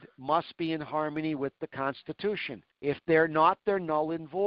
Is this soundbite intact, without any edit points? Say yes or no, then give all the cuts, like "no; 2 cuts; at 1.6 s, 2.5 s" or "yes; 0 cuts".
no; 1 cut; at 2.7 s